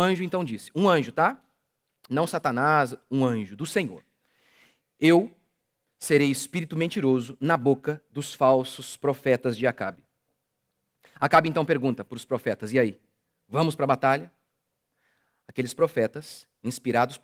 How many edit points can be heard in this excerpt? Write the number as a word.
zero